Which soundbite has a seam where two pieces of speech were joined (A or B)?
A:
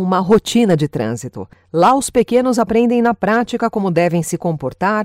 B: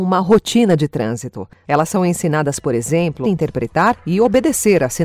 B